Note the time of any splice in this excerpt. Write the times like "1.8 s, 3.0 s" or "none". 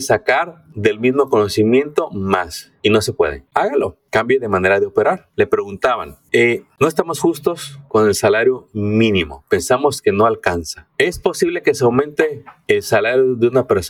3.5 s, 5.3 s